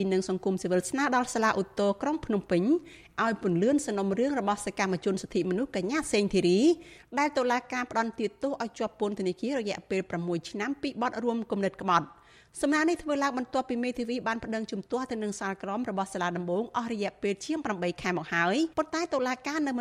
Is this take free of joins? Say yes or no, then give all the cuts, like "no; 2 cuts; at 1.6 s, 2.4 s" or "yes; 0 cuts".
no; 1 cut; at 18.7 s